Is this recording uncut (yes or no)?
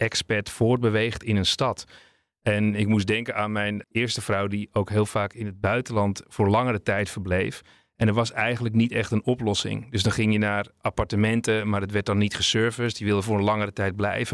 no